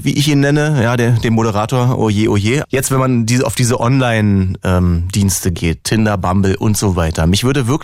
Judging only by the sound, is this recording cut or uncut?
cut